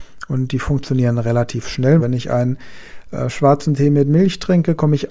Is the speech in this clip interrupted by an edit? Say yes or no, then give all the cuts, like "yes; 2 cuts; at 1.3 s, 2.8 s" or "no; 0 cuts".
yes; 1 cut; at 2.0 s